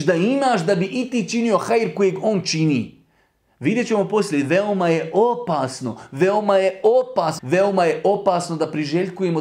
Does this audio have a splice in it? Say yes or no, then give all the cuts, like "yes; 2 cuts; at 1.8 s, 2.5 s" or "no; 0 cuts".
yes; 1 cut; at 7.4 s